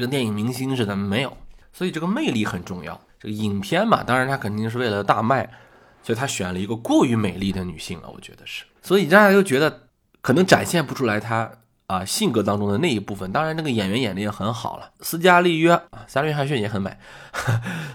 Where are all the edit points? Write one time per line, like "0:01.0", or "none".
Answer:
0:08.7
0:15.9

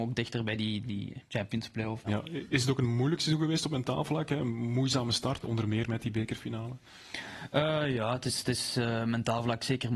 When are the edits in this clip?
0:02.0
0:05.4

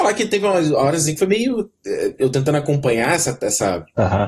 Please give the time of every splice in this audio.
none

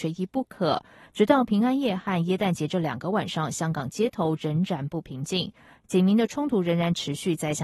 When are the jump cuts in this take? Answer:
none

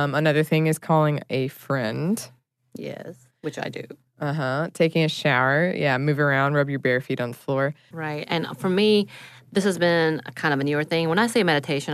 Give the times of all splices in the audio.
0:07.9

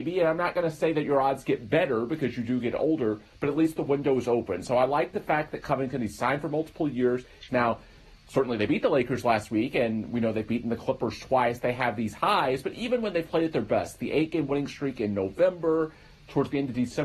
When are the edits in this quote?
0:07.5

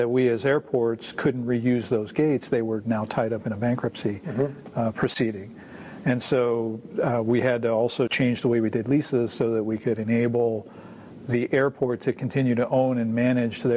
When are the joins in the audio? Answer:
none

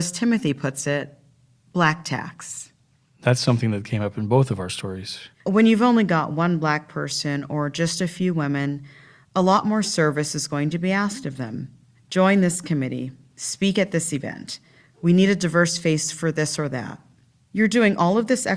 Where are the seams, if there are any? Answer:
0:05.4

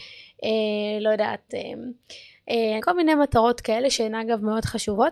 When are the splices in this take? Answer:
0:02.8

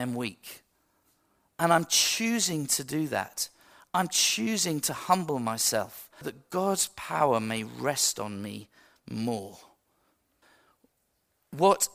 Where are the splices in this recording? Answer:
0:06.2

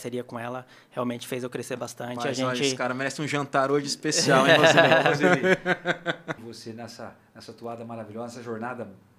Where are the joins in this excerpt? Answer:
0:06.4

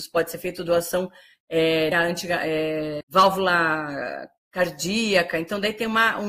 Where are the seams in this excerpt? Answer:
0:01.9
0:03.0

